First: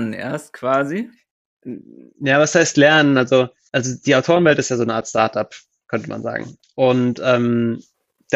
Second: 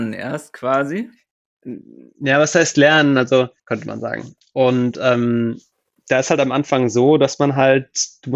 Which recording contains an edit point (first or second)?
second